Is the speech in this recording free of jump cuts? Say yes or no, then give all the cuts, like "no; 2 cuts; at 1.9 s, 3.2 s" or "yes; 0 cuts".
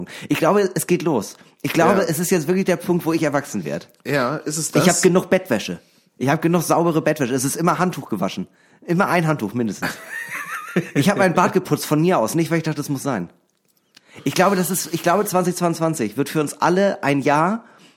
yes; 0 cuts